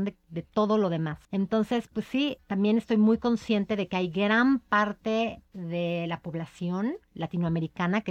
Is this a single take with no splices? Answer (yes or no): no